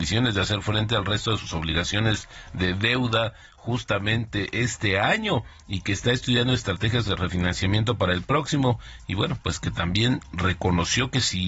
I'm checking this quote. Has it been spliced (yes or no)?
no